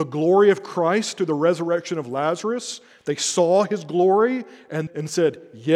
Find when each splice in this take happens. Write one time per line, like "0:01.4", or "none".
0:04.9